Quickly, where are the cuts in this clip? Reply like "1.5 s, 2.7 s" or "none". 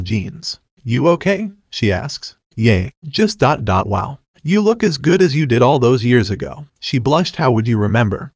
3.6 s, 6.7 s